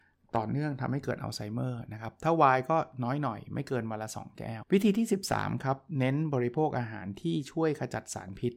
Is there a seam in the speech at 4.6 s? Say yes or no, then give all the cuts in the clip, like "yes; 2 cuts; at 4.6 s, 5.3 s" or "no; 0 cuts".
yes; 1 cut; at 4.6 s